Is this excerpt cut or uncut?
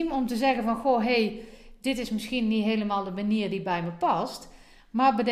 uncut